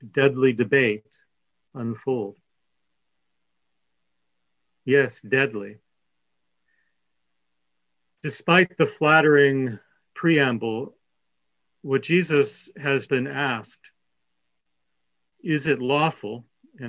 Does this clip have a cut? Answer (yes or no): yes